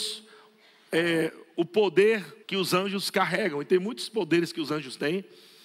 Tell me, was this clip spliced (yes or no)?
yes